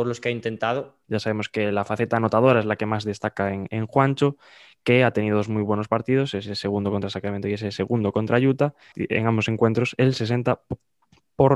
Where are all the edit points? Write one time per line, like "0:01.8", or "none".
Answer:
0:01.0
0:08.9